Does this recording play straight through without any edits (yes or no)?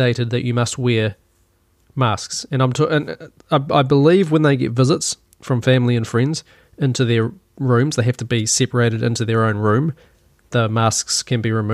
yes